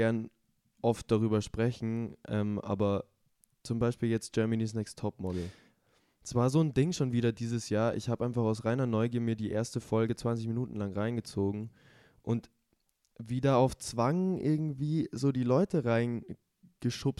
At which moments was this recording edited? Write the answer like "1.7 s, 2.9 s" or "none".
none